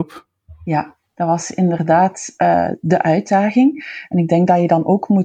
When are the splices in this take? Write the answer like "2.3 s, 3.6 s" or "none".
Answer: none